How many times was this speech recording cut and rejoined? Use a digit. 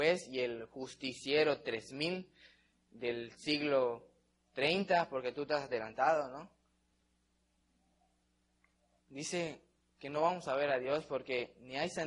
1